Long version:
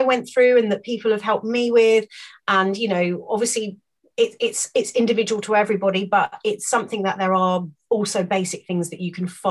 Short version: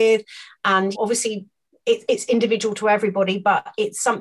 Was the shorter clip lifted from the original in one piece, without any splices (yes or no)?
no